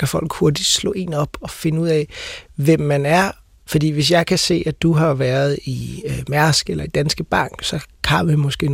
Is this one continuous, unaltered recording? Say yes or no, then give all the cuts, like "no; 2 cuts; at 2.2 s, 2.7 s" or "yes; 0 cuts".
no; 1 cut; at 3.6 s